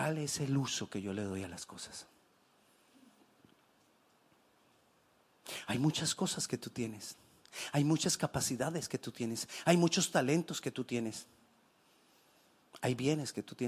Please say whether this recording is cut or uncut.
uncut